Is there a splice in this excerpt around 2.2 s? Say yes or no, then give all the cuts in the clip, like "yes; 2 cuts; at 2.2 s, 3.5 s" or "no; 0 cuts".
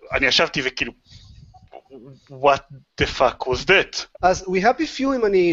no; 1 cut; at 4.2 s